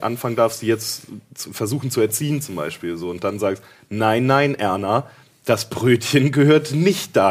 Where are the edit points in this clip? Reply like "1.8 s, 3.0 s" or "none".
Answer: none